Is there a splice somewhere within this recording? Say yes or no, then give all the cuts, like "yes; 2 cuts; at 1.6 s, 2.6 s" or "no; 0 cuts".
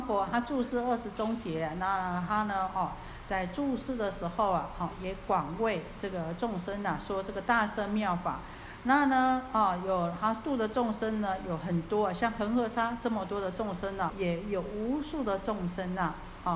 yes; 1 cut; at 14.1 s